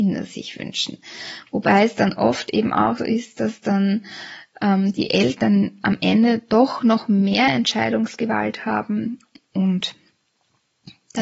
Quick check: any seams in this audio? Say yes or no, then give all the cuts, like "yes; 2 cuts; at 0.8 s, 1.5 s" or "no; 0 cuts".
yes; 1 cut; at 3.0 s